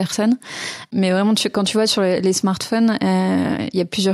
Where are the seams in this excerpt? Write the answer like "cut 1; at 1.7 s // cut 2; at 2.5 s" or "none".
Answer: none